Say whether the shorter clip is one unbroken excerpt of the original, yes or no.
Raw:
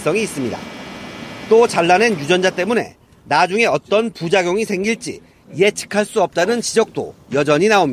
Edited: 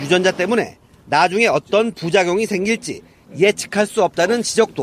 yes